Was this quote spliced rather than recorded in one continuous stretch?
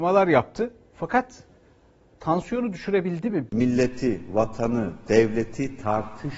yes; 2 cuts; at 3.5 s, 5.1 s

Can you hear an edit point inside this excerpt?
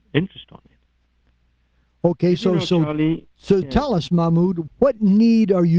yes; 2 cuts; at 3.6 s, 4.7 s

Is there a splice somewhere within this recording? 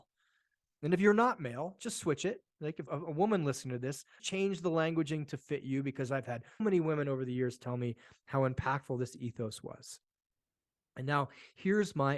yes; 3 cuts; at 2.9 s, 4.2 s, 6.6 s

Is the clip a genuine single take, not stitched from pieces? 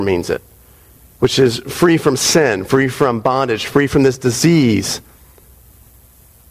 yes; 0 cuts

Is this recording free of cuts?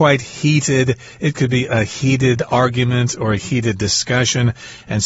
yes; 0 cuts

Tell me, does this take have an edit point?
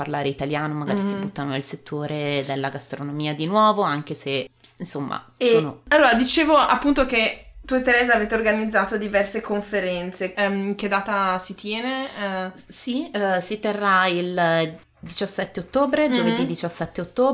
yes; 1 cut; at 10.3 s

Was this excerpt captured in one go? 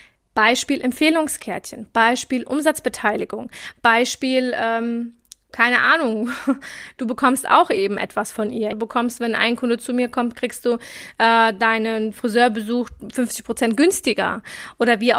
no; 1 cut; at 8.7 s

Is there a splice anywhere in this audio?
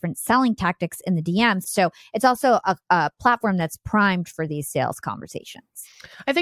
yes; 1 cut; at 1.6 s

